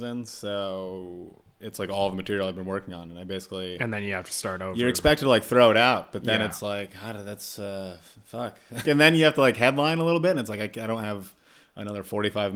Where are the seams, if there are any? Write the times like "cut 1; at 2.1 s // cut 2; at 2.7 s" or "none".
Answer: cut 1; at 8.8 s